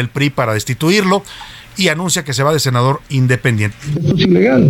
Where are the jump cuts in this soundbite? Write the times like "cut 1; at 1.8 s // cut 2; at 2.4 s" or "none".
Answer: cut 1; at 3.7 s